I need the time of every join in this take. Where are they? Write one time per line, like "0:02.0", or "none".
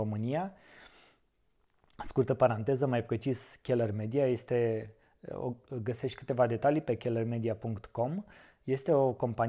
none